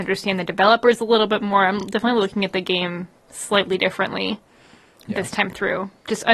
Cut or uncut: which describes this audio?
uncut